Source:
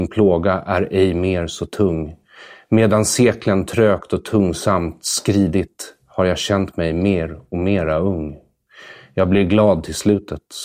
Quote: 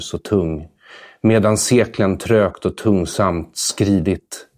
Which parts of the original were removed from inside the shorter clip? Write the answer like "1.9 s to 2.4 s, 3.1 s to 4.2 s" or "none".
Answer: none

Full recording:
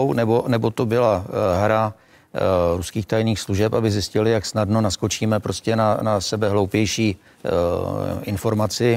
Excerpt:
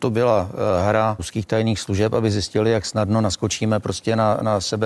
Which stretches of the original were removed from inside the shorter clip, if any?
1.9 s to 2.8 s

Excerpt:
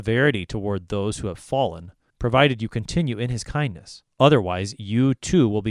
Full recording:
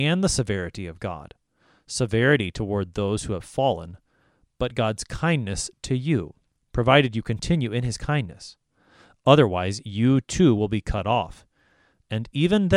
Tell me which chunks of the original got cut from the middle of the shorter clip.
4.2 s to 6.6 s, 8.6 s to 9.2 s

